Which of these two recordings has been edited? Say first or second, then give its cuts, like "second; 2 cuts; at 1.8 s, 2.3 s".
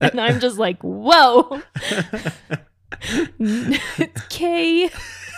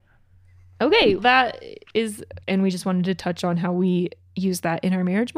second; 2 cuts; at 1.2 s, 2.4 s